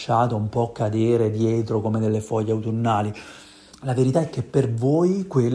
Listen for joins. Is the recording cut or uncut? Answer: cut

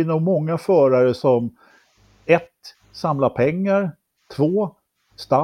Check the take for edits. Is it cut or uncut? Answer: uncut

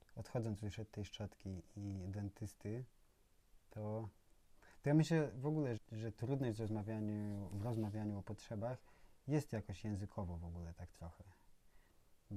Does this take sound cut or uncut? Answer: cut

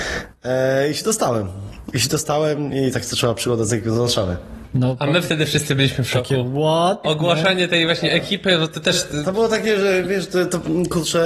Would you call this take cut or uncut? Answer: cut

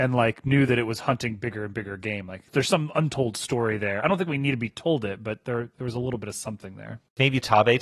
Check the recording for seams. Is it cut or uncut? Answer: uncut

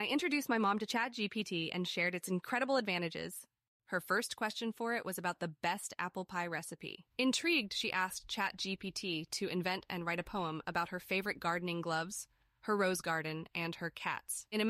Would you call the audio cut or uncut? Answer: cut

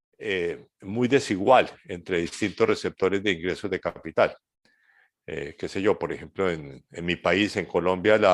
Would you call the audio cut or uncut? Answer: uncut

